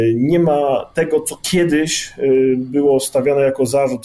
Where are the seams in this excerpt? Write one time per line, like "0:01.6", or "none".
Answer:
none